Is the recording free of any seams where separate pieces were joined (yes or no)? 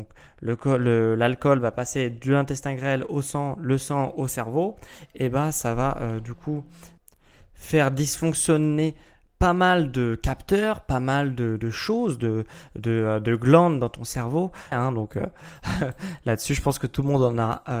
no